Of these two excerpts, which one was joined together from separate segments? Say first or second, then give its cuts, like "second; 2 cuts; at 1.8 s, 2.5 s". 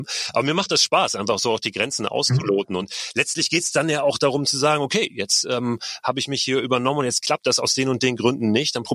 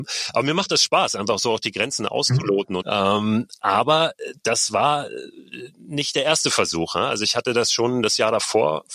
second; 1 cut; at 2.8 s